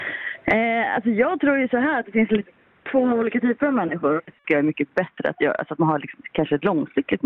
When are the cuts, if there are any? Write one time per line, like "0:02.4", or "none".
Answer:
0:04.2